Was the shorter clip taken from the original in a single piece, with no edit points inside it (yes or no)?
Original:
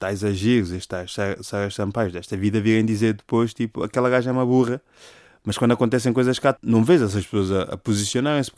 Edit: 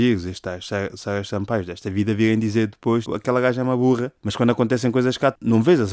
no